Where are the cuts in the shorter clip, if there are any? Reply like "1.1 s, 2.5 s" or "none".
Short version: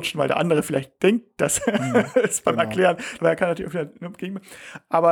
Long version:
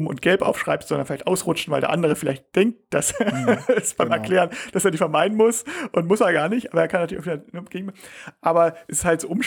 3.2 s